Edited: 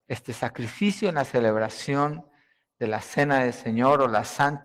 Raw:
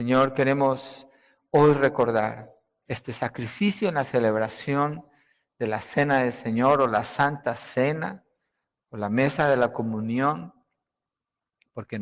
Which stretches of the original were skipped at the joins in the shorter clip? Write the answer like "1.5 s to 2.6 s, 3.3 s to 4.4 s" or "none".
none